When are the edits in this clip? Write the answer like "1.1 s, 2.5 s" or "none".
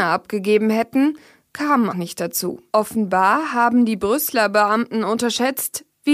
1.9 s